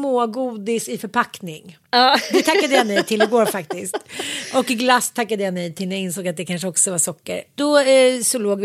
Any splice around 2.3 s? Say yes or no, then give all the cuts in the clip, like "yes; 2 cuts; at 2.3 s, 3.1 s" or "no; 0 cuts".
no; 0 cuts